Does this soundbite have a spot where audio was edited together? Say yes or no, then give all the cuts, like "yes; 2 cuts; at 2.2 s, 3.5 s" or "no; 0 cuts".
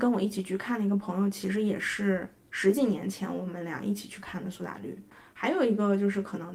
no; 0 cuts